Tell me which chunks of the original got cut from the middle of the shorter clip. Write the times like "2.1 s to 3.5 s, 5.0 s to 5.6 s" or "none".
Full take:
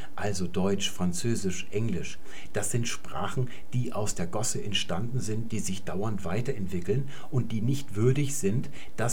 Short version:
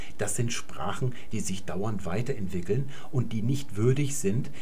3.7 s to 5.5 s

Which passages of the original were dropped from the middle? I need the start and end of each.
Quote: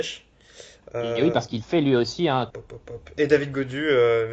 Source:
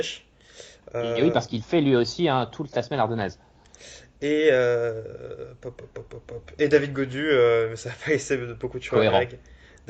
2.5 s to 5.9 s

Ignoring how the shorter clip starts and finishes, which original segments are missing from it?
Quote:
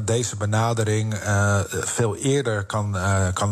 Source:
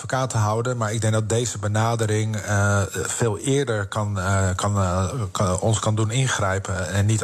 none

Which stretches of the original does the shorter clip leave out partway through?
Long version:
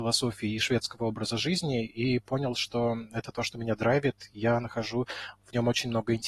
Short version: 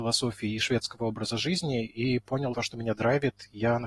2.5 s to 3.3 s

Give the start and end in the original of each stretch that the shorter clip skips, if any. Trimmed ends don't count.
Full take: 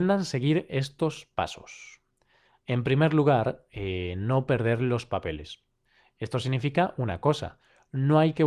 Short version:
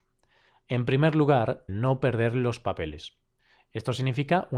3.7 s to 4.1 s

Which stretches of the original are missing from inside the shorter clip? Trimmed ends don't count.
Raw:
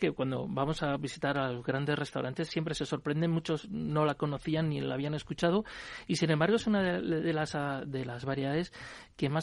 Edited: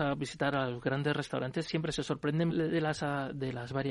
3.3 s to 7.0 s

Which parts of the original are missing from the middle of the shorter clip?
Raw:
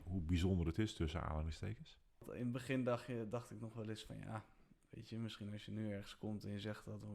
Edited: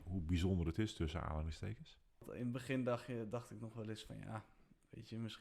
none

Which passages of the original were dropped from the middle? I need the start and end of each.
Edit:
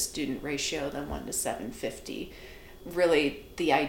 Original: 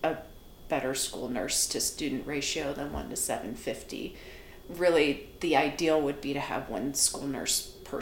none

